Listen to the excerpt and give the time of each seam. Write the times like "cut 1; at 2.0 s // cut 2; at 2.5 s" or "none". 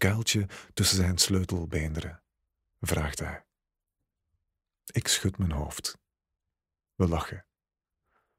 cut 1; at 2.6 s